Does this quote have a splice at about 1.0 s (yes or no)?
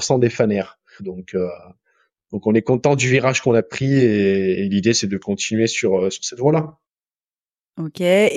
yes